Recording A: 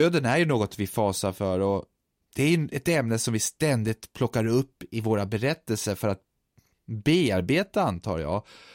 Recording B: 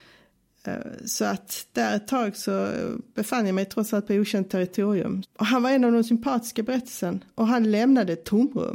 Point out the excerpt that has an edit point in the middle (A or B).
B